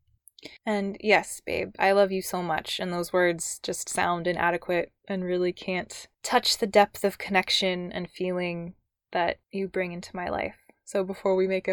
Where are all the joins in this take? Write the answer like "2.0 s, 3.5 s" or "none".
none